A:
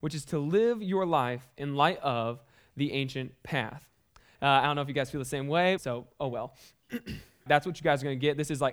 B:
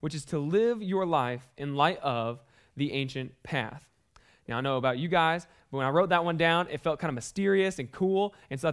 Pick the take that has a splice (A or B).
A